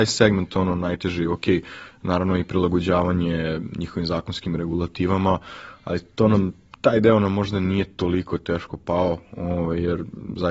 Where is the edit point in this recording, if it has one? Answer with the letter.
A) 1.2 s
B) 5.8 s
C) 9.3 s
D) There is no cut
D